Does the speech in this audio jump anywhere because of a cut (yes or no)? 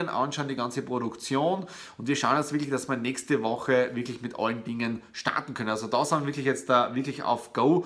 no